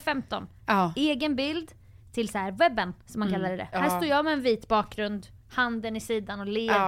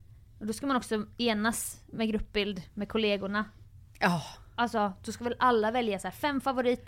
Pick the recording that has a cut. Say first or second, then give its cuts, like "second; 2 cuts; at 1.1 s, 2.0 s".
first; 1 cut; at 3.7 s